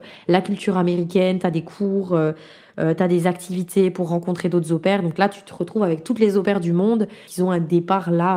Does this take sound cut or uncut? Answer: uncut